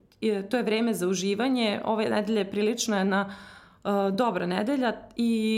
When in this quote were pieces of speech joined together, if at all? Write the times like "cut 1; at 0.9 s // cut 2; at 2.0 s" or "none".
none